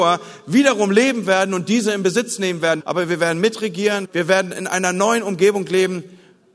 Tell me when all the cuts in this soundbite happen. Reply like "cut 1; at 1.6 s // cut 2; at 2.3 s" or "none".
cut 1; at 2.8 s // cut 2; at 4.0 s